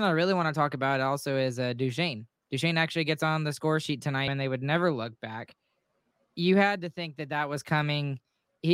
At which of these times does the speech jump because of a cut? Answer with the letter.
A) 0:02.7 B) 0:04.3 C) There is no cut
B